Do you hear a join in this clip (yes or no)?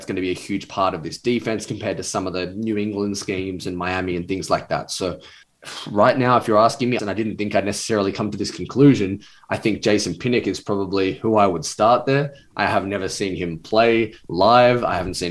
yes